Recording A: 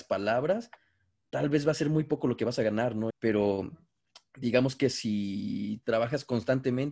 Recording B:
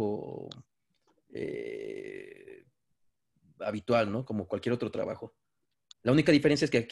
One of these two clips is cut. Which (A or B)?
A